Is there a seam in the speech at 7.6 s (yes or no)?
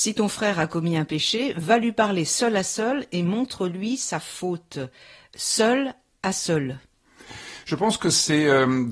no